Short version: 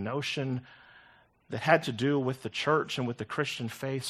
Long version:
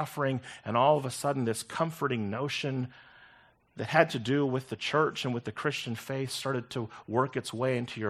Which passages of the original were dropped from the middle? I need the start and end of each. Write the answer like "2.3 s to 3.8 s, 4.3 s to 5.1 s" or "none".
none